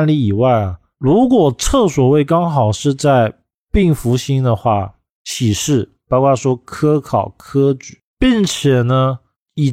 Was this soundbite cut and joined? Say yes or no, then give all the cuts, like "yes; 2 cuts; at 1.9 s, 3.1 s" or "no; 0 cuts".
yes; 2 cuts; at 0.9 s, 5.1 s